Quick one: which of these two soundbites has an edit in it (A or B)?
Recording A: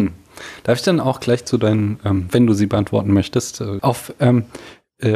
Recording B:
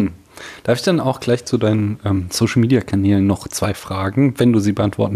A